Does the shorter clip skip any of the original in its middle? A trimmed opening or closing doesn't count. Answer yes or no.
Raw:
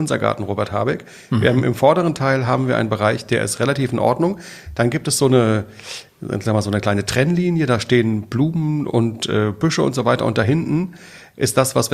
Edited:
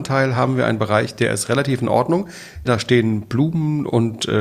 yes